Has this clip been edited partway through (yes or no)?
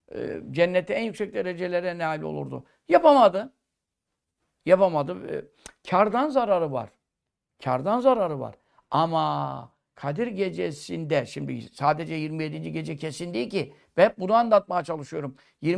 no